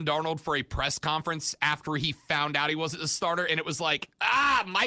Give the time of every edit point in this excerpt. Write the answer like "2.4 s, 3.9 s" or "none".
none

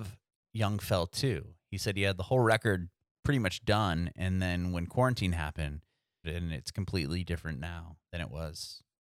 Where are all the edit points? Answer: 6.2 s

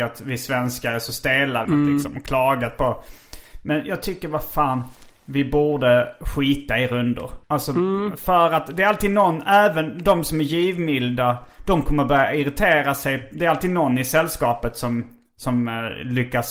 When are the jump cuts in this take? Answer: 1.6 s, 7.4 s

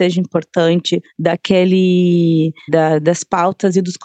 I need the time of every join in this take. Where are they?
1.1 s, 2.7 s

